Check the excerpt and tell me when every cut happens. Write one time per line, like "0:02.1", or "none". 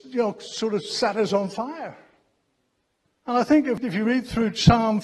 none